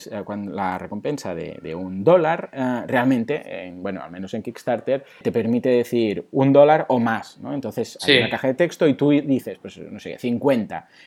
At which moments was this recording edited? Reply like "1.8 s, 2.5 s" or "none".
5.2 s